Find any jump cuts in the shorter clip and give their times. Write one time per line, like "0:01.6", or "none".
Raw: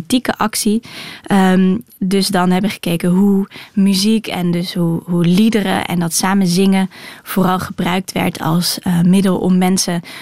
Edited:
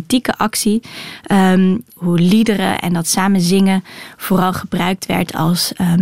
0:02.0